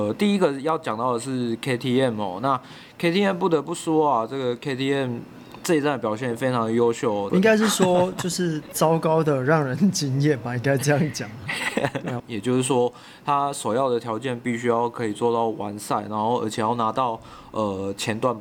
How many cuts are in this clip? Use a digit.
2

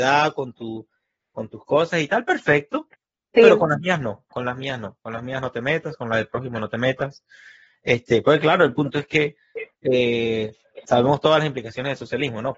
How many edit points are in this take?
1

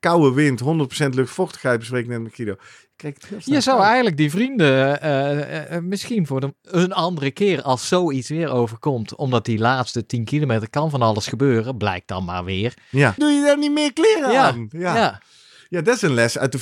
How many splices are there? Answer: 1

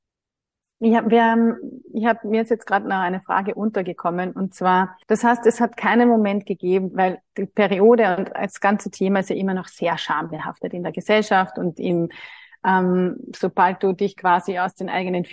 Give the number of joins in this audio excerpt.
2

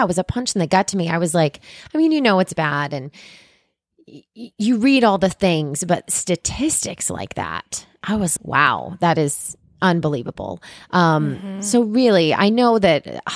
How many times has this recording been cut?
1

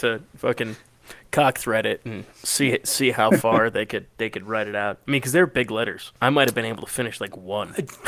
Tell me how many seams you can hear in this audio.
1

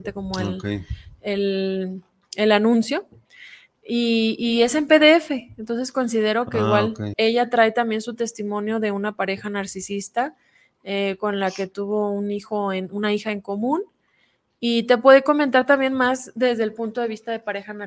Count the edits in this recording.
1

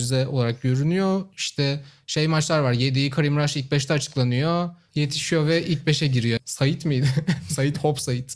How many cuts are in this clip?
2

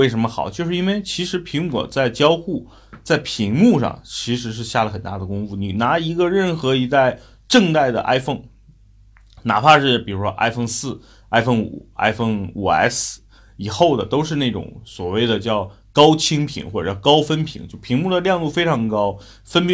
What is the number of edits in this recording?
0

